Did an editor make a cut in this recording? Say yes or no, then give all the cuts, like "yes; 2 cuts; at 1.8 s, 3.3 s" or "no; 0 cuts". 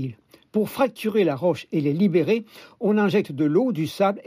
no; 0 cuts